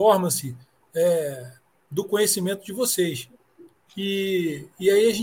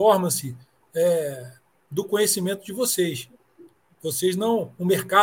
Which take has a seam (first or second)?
first